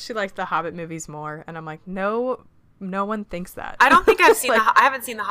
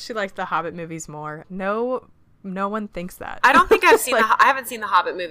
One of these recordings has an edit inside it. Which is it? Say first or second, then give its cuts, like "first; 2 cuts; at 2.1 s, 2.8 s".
second; 1 cut; at 1.4 s